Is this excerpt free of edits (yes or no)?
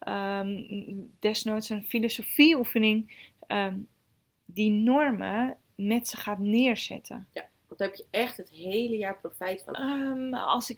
no